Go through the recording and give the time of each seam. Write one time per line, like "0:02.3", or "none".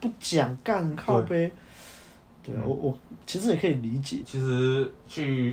0:04.2